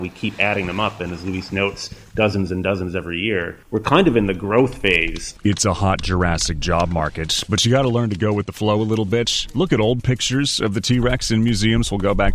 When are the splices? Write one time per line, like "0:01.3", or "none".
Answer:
none